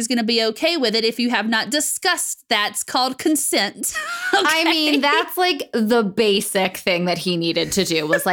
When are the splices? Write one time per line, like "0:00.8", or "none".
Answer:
none